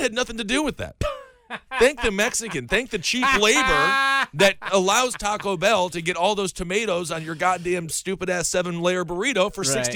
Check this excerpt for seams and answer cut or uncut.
uncut